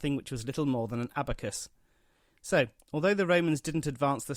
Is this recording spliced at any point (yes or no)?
no